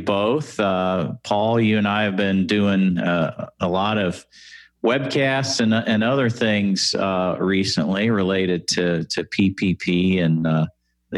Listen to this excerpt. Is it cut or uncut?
uncut